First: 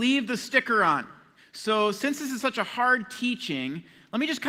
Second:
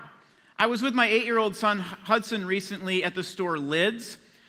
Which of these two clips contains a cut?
first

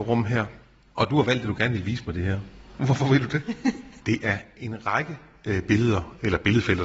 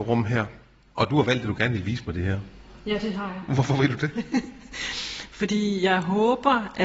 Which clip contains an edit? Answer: first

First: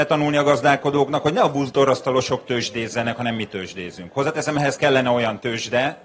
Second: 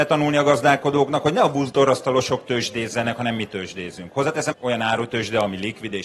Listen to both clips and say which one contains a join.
second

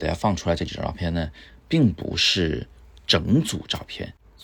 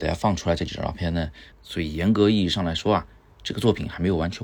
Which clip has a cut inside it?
second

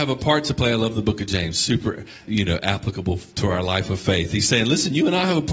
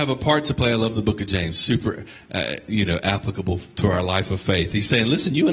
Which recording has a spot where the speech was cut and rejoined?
first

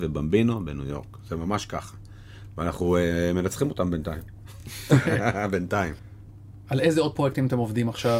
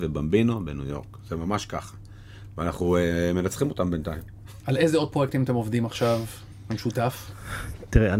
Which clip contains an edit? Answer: second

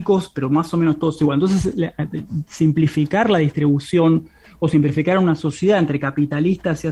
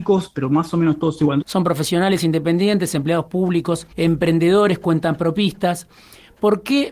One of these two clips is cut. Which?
second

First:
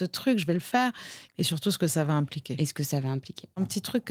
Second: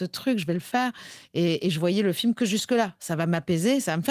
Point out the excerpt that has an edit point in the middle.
first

